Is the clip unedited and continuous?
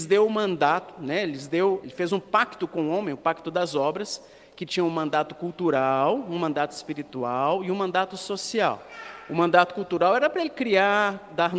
no; 1 cut; at 1.8 s

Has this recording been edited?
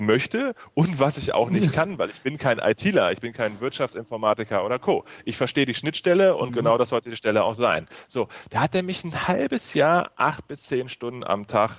no; 0 cuts

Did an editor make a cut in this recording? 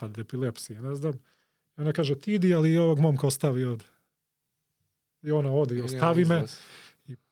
no; 0 cuts

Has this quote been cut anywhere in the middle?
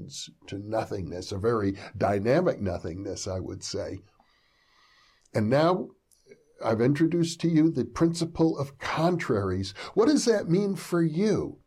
no; 0 cuts

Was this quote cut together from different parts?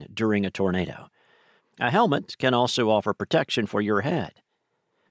yes; 1 cut; at 1.6 s

